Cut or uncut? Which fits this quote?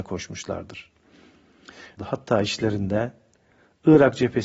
cut